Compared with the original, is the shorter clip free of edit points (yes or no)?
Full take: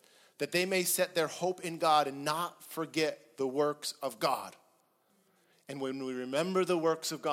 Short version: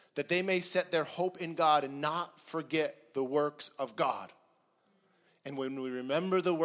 yes